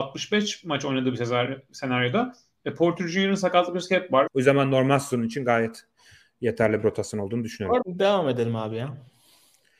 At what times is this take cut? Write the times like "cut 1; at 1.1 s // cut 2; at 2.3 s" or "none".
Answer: cut 1; at 4.3 s // cut 2; at 7.8 s